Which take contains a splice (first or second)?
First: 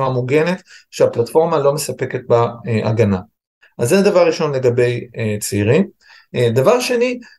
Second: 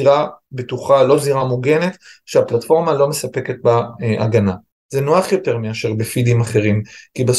second